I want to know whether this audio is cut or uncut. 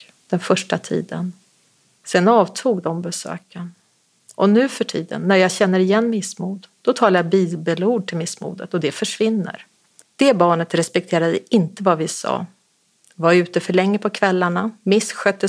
cut